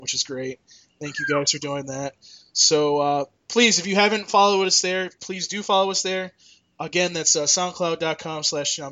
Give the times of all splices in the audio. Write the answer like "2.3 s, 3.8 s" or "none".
none